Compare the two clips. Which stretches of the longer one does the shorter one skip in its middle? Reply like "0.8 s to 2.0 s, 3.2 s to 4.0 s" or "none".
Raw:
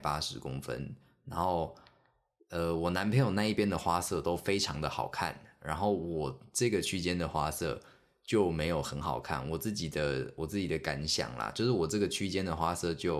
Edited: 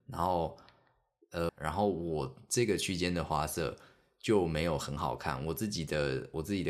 2.7 s to 5.5 s